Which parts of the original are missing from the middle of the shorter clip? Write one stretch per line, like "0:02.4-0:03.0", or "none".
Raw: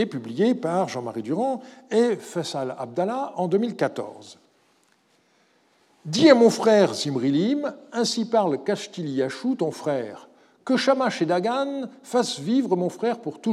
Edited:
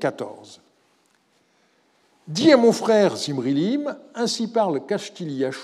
none